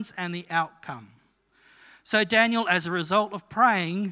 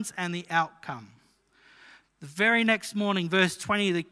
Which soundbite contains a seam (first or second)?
second